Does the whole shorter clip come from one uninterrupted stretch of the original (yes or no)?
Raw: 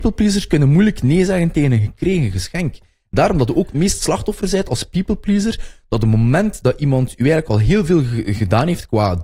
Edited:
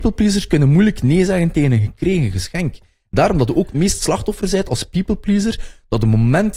yes